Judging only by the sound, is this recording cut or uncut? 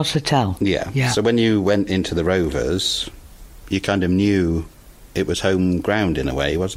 uncut